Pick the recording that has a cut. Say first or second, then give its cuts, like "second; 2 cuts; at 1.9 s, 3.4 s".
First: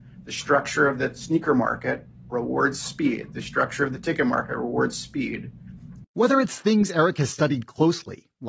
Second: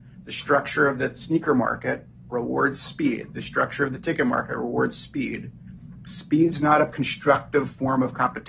first; 1 cut; at 6.0 s